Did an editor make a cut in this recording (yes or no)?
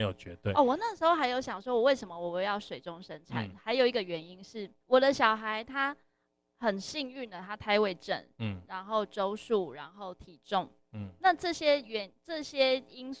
yes